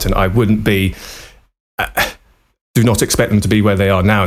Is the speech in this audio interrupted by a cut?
no; 0 cuts

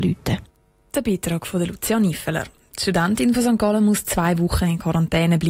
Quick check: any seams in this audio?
no; 0 cuts

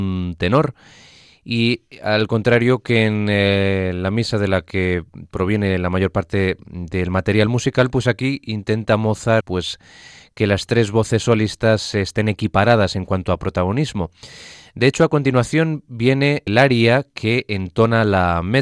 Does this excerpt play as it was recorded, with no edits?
no; 2 cuts; at 9.4 s, 16.5 s

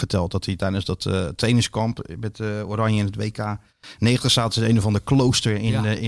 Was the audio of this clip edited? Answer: no; 0 cuts

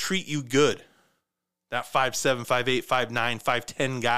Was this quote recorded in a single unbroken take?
yes; 0 cuts

